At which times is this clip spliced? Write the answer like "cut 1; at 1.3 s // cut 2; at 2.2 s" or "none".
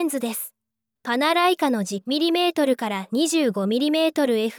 none